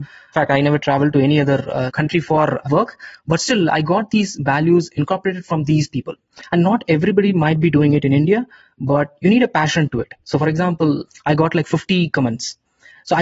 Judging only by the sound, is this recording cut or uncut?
cut